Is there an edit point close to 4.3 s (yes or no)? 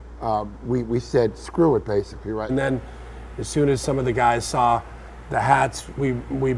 no